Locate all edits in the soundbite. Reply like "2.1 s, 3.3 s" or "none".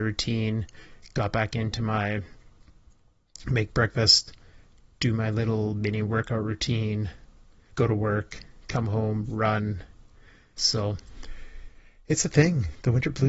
7.7 s, 10.6 s